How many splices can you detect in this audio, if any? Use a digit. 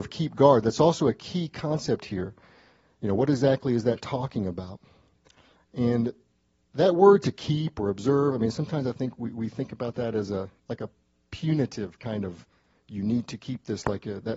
1